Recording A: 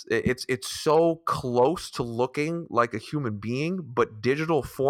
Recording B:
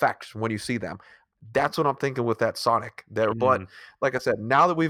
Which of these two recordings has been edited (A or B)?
B